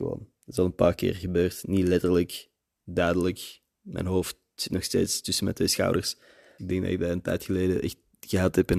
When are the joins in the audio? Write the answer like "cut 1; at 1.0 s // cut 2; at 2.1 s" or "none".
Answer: cut 1; at 6.6 s

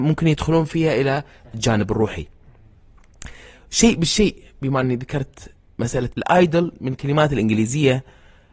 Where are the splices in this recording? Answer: cut 1; at 6.1 s

